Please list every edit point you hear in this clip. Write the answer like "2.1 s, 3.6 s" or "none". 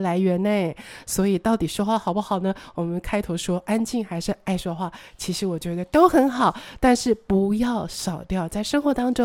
none